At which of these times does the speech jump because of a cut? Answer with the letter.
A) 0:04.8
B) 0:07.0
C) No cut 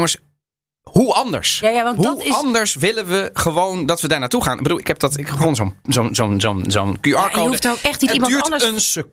A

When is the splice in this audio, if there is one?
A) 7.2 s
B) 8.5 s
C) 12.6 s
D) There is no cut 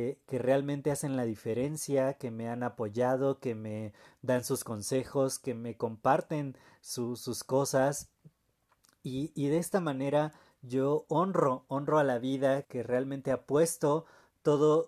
C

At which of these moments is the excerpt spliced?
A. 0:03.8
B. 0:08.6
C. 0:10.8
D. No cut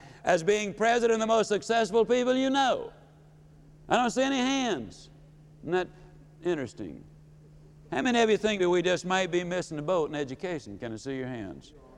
B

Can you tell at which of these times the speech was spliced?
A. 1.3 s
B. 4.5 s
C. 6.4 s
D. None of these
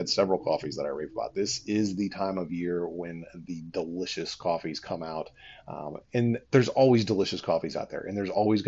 C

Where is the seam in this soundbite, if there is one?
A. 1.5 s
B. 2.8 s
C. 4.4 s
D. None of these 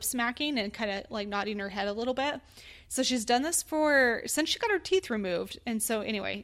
D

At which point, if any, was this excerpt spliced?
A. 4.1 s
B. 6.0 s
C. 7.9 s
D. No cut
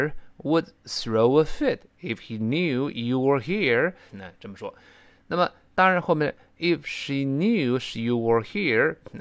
A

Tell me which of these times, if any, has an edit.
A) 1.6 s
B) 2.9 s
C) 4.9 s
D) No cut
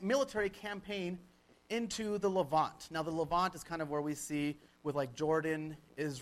D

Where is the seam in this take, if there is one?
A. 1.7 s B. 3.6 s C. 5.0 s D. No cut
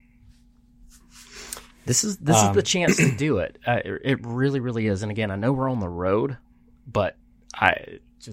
A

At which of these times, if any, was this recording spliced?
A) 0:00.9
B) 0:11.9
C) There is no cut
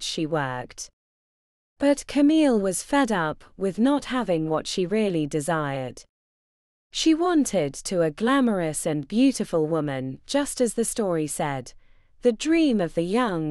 C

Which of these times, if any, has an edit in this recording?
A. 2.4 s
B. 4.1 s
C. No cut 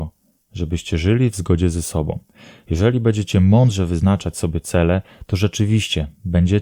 C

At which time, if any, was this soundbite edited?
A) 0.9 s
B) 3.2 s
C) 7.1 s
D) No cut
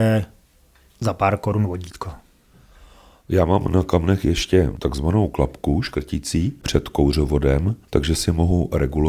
D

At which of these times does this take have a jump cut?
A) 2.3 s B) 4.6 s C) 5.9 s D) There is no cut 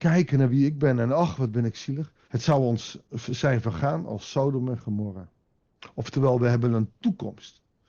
A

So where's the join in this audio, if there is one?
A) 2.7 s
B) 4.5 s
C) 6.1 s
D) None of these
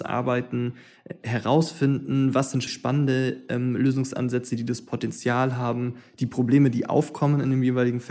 A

